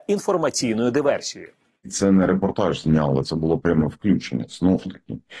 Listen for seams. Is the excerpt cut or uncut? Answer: uncut